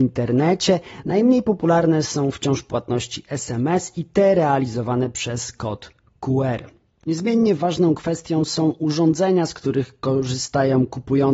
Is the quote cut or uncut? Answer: uncut